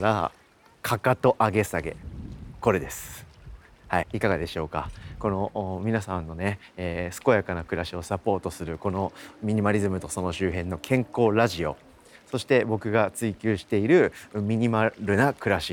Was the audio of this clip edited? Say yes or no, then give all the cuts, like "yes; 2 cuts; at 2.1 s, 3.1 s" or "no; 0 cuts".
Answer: yes; 1 cut; at 4.0 s